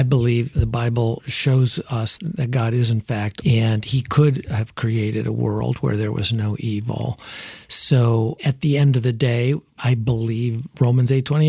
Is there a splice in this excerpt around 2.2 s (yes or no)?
yes